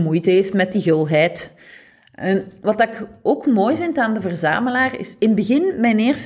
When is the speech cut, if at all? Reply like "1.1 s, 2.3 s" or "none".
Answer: none